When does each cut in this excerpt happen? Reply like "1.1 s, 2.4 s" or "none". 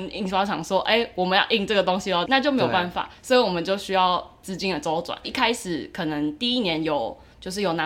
2.3 s, 5.2 s